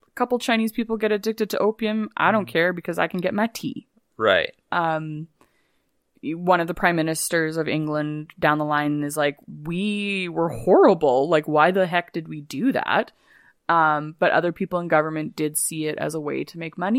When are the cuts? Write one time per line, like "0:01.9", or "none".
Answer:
0:04.7